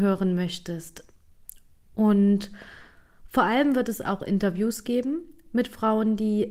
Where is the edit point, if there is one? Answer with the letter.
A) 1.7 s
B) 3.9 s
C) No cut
C